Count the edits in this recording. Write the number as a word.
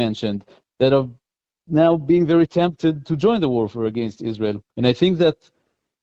one